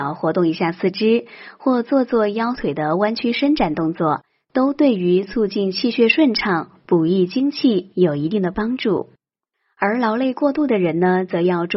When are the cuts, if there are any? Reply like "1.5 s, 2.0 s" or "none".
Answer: none